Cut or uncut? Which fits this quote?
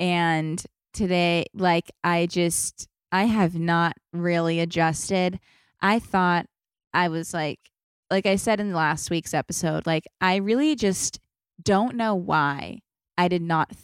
uncut